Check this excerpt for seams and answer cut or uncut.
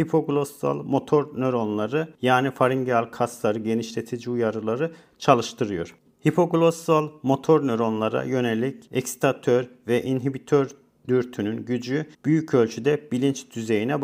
cut